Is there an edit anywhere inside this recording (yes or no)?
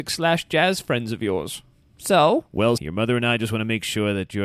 yes